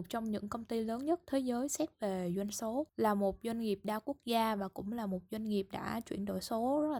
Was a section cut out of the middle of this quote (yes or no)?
yes